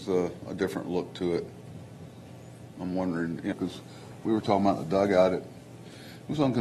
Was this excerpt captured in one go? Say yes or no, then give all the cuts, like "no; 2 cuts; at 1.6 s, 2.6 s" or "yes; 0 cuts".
no; 1 cut; at 3.5 s